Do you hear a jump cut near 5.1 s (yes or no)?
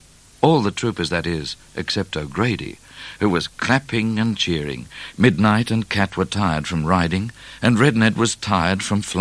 yes